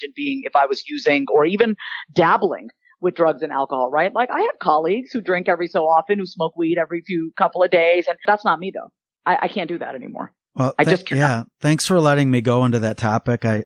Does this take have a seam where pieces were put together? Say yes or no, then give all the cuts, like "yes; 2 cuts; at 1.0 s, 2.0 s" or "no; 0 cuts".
no; 0 cuts